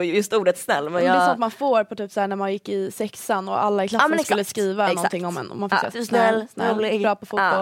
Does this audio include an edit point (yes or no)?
yes